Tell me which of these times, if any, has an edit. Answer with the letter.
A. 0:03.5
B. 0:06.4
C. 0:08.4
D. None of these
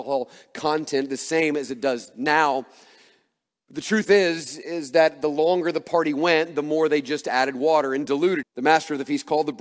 C